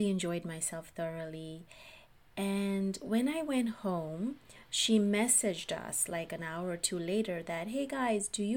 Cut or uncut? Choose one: uncut